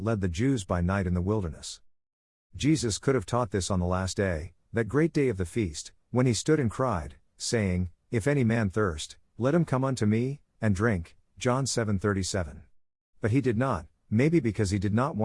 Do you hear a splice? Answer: no; 0 cuts

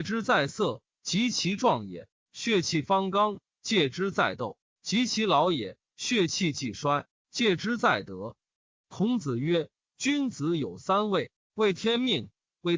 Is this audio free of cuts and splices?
yes; 0 cuts

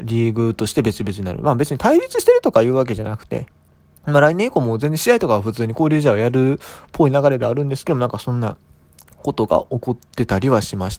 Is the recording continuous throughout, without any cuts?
yes; 0 cuts

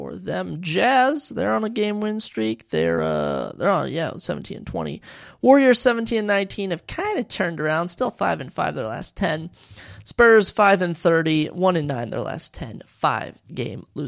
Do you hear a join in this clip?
no; 0 cuts

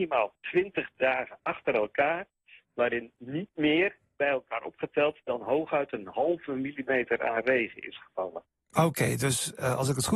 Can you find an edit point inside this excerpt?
no; 0 cuts

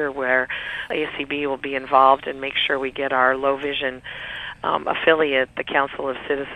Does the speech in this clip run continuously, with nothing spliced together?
yes; 0 cuts

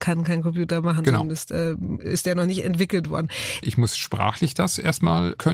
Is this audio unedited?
no; 1 cut; at 3.6 s

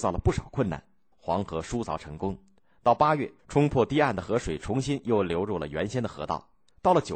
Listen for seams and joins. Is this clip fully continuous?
no; 2 cuts; at 1.1 s, 3.4 s

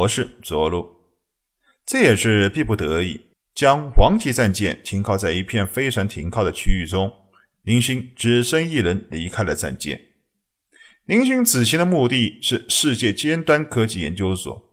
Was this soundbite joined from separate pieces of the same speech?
yes; 1 cut; at 3.3 s

